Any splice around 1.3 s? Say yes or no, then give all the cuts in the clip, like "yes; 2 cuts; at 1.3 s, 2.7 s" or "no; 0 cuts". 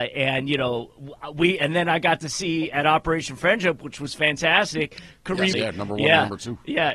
no; 1 cut; at 5.5 s